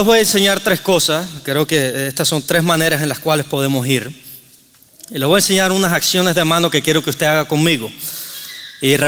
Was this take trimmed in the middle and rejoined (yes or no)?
no